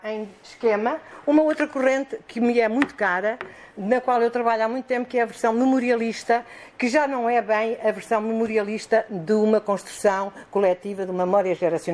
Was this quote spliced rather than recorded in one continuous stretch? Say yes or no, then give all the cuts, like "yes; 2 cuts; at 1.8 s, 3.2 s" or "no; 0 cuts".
no; 0 cuts